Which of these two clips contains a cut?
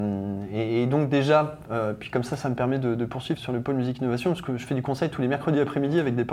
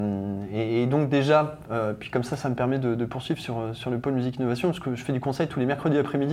first; 1 cut; at 3.4 s

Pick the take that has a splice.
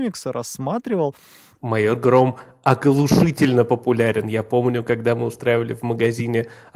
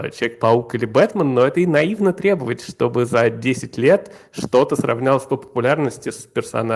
first; 1 cut; at 1.5 s

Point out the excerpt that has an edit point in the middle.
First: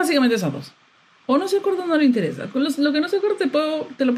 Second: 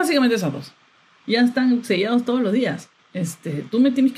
second; 2 cuts; at 1.2 s, 3.0 s

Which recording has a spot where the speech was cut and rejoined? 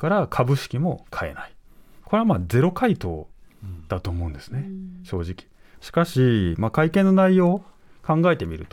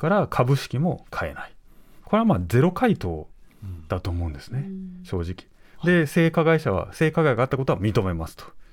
first; 1 cut; at 5.8 s

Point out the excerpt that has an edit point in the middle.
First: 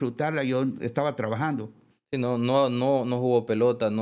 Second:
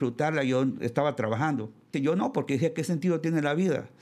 second; 1 cut; at 1.9 s

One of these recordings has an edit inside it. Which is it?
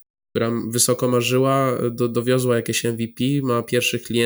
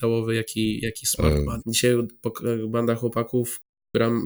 second; 1 cut; at 1.6 s

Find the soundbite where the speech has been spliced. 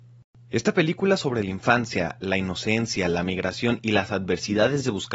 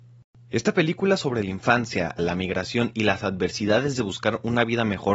second; 1 cut; at 2.2 s

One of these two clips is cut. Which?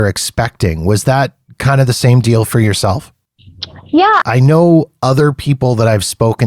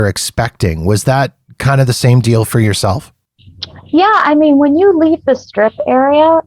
first; 1 cut; at 4.2 s

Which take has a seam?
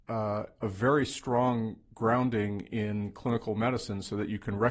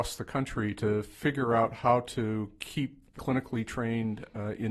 second; 1 cut; at 3.2 s

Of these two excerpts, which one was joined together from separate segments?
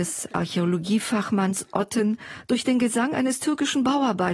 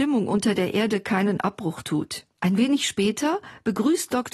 second; 1 cut; at 2.3 s

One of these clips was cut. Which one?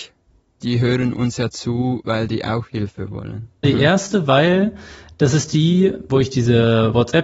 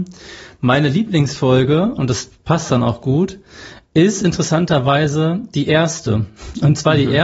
first; 2 cuts; at 3.6 s, 6.1 s

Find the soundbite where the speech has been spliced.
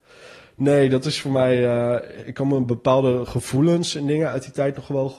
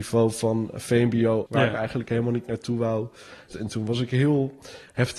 second; 2 cuts; at 1.5 s, 3.5 s

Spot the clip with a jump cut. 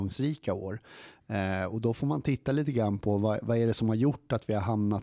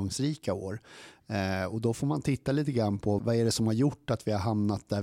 second; 1 cut; at 3.2 s

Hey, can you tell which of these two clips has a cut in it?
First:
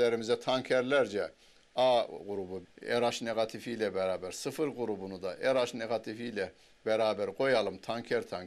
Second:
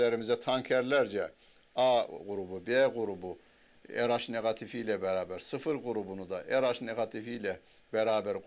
first; 1 cut; at 2.6 s

